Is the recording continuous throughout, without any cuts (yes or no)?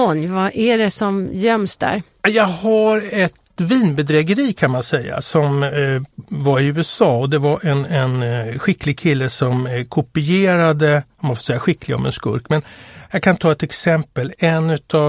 yes